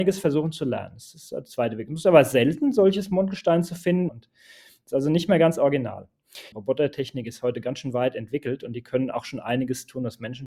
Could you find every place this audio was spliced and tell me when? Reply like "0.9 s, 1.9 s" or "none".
4.1 s, 6.5 s